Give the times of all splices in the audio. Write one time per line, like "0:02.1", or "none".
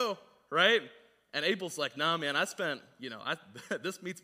none